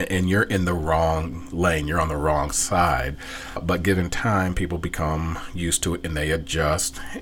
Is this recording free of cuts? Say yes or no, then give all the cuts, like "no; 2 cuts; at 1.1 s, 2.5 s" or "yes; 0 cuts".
yes; 0 cuts